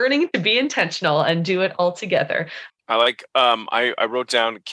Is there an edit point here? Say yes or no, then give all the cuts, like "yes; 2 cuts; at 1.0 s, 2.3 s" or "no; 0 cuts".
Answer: yes; 1 cut; at 2.7 s